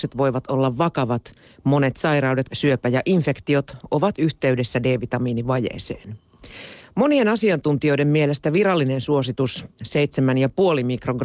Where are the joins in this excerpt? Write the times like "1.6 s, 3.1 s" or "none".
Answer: 2.5 s